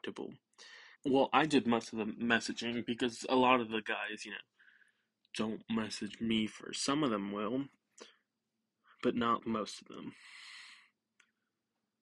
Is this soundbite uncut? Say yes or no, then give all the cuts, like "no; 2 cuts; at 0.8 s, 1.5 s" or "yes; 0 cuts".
no; 2 cuts; at 1.0 s, 9.4 s